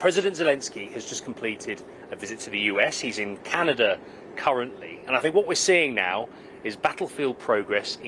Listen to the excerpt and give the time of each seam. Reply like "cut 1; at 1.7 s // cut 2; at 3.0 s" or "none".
none